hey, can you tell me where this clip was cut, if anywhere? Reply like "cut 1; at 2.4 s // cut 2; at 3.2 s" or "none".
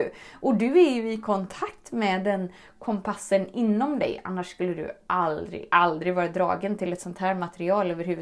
cut 1; at 5.7 s